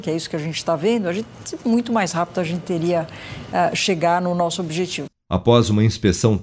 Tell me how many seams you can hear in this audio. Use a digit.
0